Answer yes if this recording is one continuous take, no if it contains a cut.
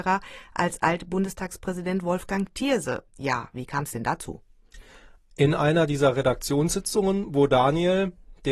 yes